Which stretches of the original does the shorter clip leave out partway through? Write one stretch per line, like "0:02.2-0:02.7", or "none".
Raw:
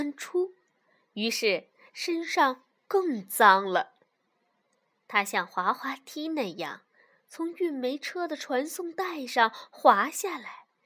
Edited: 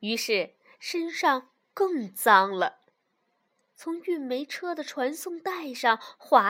0:04.8-0:07.2